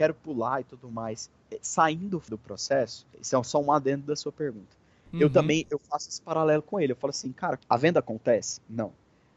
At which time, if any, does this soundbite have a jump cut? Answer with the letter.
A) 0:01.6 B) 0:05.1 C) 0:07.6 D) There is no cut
C